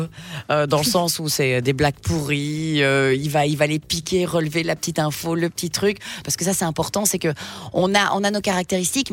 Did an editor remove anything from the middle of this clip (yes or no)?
yes